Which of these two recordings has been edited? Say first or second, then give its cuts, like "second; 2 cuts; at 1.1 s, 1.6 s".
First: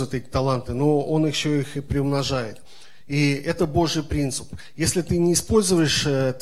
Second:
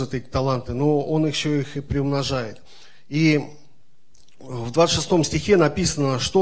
first; 1 cut; at 3.0 s